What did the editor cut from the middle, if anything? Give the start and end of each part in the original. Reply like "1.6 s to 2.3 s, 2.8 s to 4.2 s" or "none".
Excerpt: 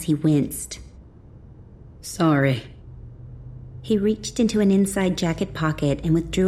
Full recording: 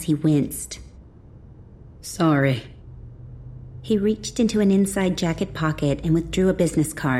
none